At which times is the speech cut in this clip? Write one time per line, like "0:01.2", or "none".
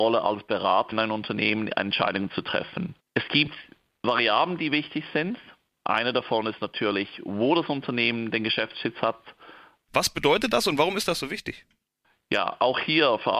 0:00.9
0:09.9